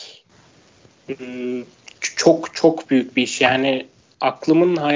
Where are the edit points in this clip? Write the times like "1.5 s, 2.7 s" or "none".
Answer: none